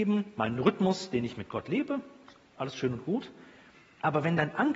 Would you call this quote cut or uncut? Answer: uncut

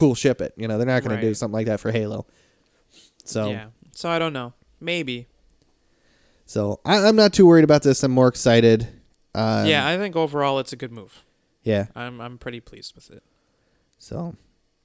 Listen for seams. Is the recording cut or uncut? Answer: uncut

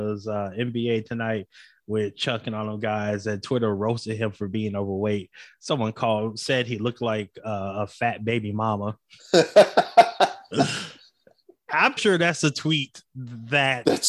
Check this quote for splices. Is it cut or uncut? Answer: cut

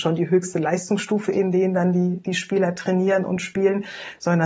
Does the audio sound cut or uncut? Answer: uncut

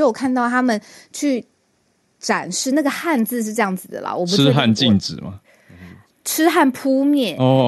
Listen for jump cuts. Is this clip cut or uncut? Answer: uncut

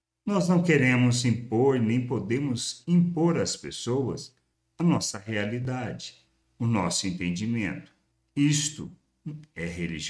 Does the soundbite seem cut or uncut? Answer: uncut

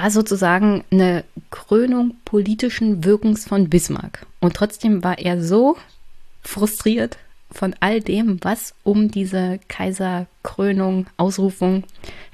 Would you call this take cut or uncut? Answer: uncut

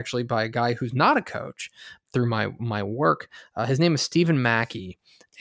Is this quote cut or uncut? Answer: cut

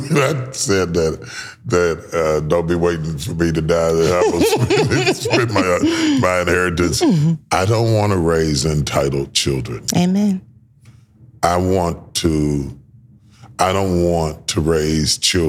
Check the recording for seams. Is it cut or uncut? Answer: uncut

